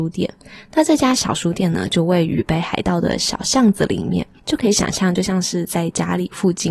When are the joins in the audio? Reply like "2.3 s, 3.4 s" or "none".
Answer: none